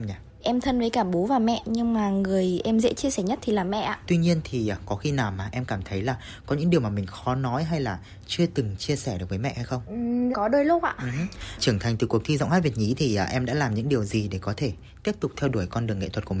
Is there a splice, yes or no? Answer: yes